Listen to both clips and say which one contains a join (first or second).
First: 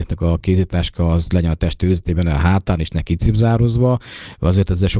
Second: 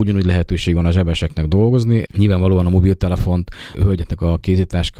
second